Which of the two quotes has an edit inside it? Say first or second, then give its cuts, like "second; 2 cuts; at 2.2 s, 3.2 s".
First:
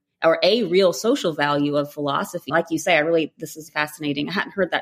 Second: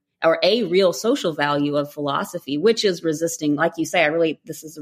first; 2 cuts; at 2.5 s, 3.7 s